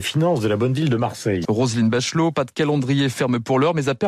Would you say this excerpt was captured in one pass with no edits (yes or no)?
no